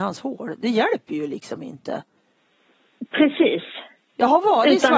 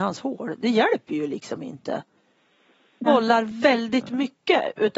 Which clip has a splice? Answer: second; 1 cut; at 3.1 s

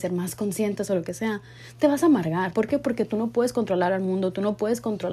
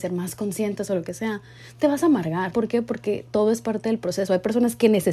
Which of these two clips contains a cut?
second; 1 cut; at 2.5 s

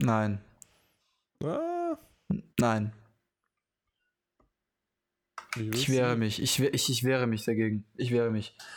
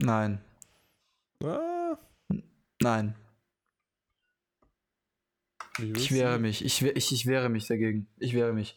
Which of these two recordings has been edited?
first; 1 cut; at 2.5 s

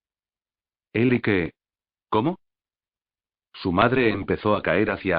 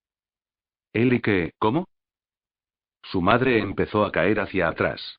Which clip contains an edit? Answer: second; 1 cut; at 1.5 s

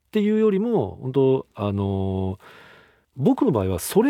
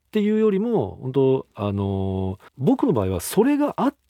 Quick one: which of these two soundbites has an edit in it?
second; 1 cut; at 2.5 s

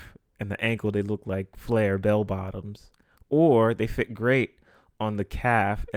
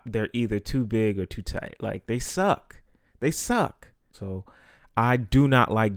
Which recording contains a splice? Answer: second; 1 cut; at 4.1 s

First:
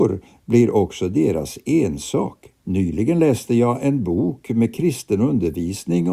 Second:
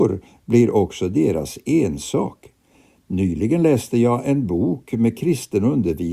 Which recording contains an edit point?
first; 1 cut; at 2.6 s

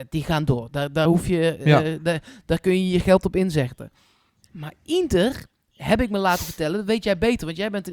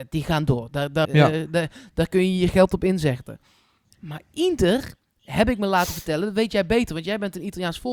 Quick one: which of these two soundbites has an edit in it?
second; 1 cut; at 1.1 s

